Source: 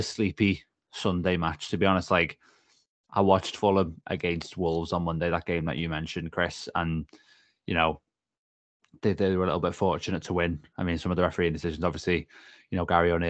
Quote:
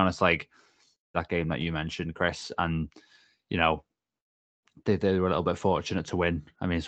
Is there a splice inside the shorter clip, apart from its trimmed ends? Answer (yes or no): yes